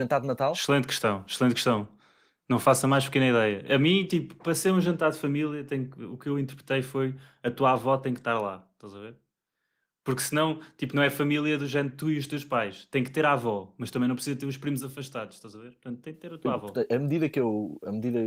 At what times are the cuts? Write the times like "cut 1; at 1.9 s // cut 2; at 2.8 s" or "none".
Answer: none